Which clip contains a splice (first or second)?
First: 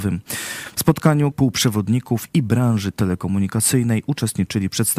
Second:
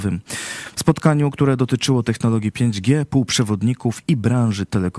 first